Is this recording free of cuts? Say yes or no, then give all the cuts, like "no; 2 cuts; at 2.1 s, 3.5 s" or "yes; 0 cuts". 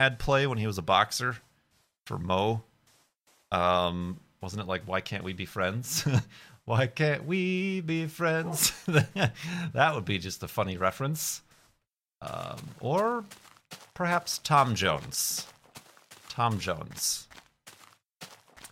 yes; 0 cuts